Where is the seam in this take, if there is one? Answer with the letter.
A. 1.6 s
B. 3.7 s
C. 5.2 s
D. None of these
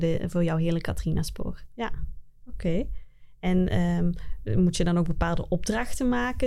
A